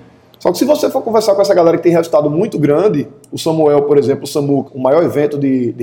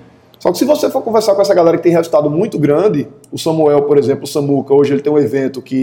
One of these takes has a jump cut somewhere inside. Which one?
first; 1 cut; at 4.7 s

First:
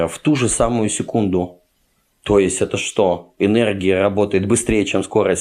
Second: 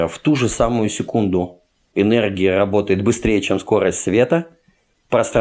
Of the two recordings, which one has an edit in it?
second; 1 cut; at 1.9 s

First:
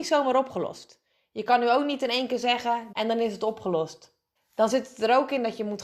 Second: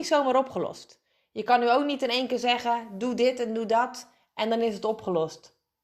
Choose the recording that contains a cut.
first; 2 cuts; at 2.9 s, 4.4 s

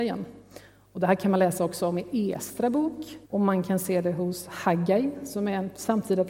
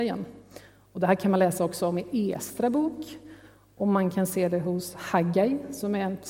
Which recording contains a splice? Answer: first; 1 cut; at 3.2 s

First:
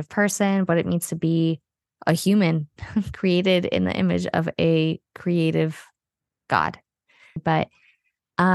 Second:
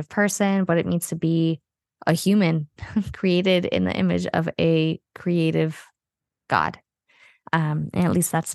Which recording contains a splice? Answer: first; 1 cut; at 7.4 s

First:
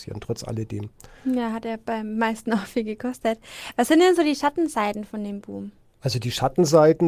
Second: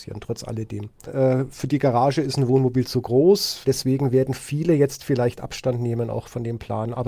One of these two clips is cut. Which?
second; 2 cuts; at 1.1 s, 3.6 s

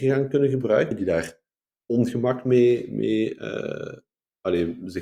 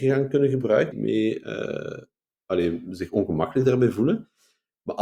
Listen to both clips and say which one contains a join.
second; 1 cut; at 0.9 s

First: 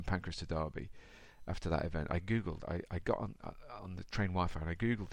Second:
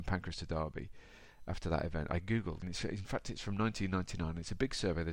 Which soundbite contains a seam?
second; 1 cut; at 2.6 s

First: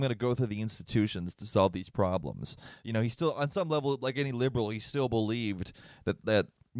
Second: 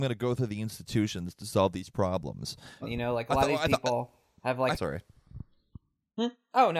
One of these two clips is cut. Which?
second; 2 cuts; at 2.8 s, 4.8 s

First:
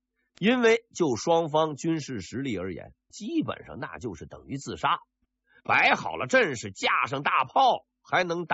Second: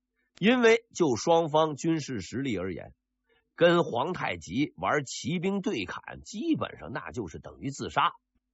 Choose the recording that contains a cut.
first; 1 cut; at 3.1 s

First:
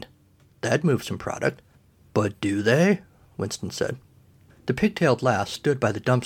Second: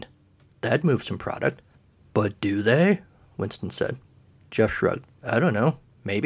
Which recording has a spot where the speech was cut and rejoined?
first; 1 cut; at 4.5 s

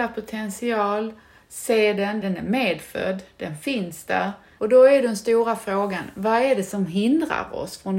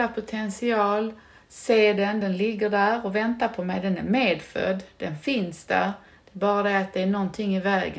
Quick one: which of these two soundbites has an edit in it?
first; 2 cuts; at 2.2 s, 4.6 s

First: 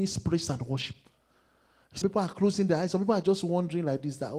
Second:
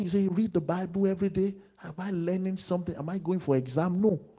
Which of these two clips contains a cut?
first; 1 cut; at 2.0 s

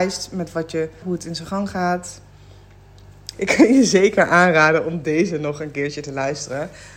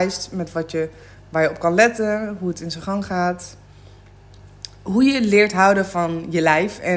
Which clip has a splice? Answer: first; 2 cuts; at 1.0 s, 3.3 s

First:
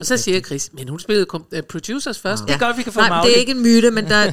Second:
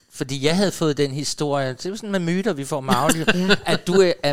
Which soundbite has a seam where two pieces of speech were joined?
first; 1 cut; at 2.5 s

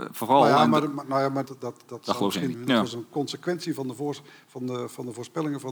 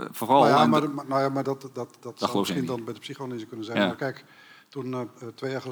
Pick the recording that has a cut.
first; 2 cuts; at 1.4 s, 2.5 s

